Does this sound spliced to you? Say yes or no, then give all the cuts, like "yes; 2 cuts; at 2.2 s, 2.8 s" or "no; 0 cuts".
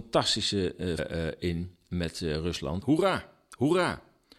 yes; 2 cuts; at 1.0 s, 2.8 s